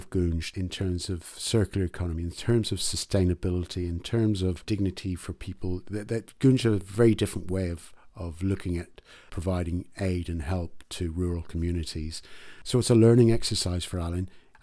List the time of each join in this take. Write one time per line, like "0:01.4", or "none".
none